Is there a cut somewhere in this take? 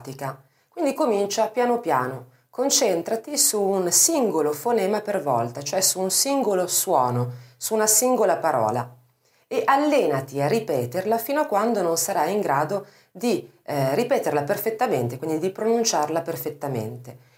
no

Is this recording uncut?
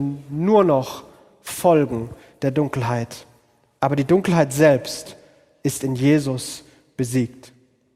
yes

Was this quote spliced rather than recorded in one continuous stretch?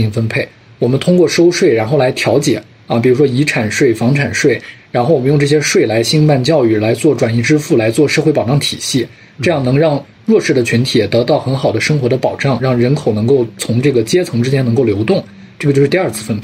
no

